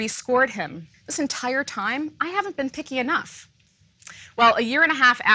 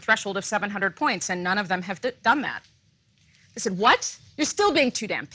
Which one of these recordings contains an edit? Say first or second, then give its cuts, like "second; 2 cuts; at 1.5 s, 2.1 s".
first; 1 cut; at 0.9 s